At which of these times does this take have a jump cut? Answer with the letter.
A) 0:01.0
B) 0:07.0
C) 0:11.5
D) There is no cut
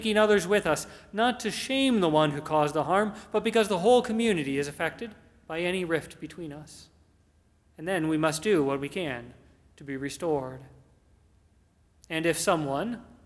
D